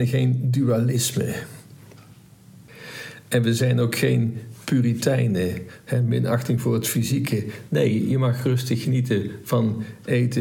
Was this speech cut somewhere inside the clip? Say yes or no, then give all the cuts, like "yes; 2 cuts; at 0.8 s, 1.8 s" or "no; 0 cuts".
no; 0 cuts